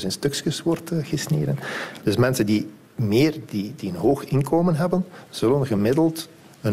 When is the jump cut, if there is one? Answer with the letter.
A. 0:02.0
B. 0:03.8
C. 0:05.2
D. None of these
A